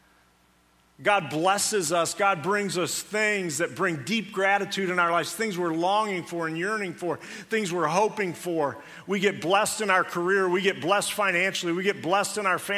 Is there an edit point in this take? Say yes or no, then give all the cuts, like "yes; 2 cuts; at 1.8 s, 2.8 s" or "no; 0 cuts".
no; 0 cuts